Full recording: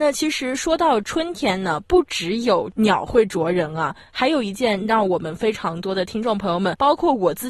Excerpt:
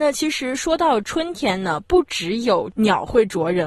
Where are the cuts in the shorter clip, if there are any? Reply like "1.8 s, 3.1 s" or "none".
none